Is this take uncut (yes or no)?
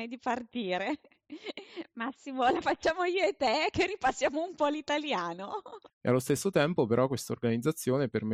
no